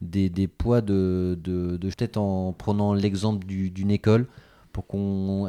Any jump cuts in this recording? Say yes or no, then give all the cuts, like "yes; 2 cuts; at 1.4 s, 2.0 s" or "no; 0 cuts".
yes; 1 cut; at 1.9 s